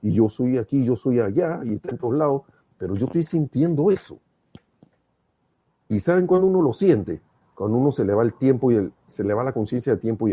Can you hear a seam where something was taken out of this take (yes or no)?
no